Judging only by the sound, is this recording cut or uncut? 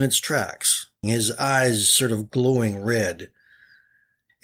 cut